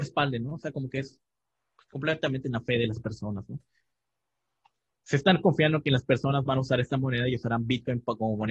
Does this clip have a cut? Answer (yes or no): yes